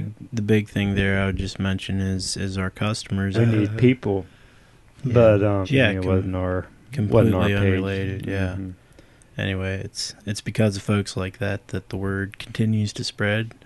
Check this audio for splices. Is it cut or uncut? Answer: cut